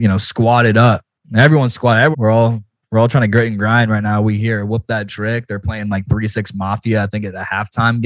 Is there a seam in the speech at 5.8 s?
no; 1 cut; at 2.1 s

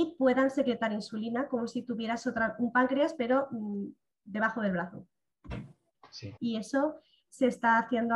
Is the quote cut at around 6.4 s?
yes; 1 cut; at 6.4 s

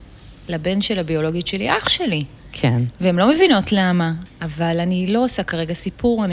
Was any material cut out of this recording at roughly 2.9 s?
no; 1 cut; at 4.3 s

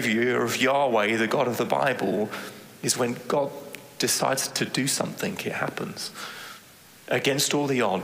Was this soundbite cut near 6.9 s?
yes; 1 cut; at 6.9 s

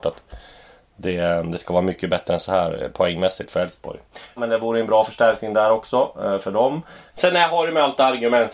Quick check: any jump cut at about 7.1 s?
yes; 2 cuts; at 4.4 s, 7.1 s

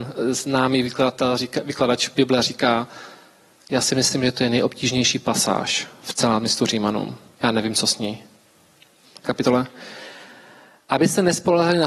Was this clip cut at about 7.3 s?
no; 1 cut; at 9.2 s

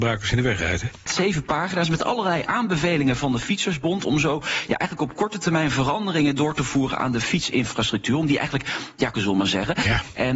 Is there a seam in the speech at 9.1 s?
yes; 2 cuts; at 1.1 s, 9.1 s

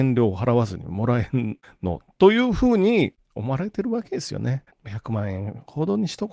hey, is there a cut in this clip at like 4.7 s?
yes; 1 cut; at 4.7 s

